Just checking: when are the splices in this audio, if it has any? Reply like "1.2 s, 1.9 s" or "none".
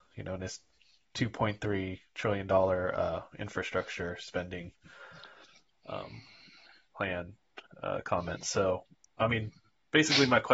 none

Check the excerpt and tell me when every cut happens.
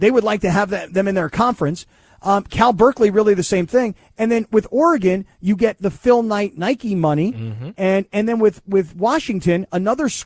none

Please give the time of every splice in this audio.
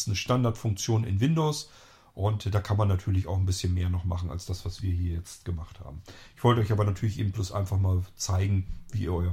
none

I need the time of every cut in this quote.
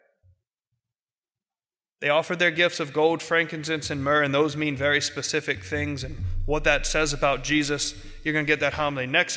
none

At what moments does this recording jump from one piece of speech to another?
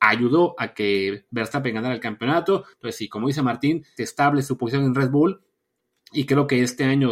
2.7 s, 4.0 s

